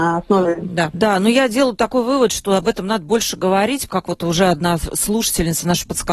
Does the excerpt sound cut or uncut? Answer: cut